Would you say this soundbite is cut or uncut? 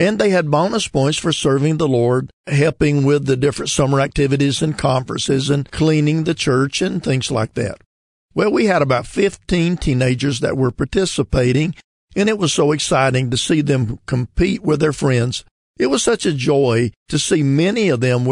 uncut